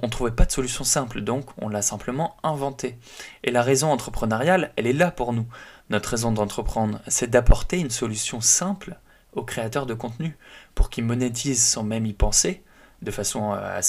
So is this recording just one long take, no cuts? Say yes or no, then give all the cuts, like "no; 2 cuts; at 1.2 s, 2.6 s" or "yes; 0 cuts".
yes; 0 cuts